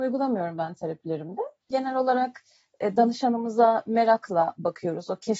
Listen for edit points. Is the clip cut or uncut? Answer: cut